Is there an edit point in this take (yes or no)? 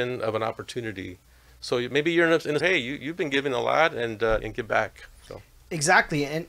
yes